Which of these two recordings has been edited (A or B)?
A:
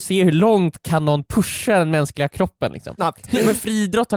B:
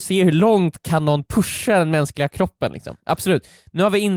A